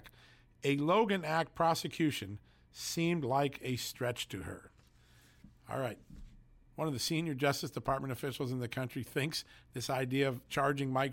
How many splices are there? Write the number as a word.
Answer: zero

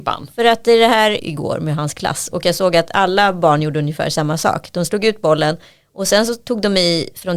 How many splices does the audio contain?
one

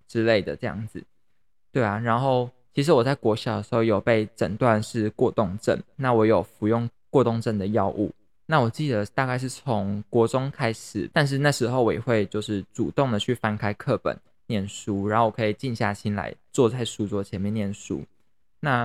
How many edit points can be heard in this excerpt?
two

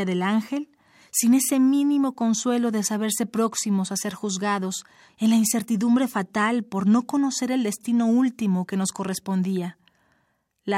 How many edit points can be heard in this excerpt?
one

